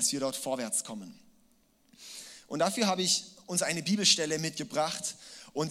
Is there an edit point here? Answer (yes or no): no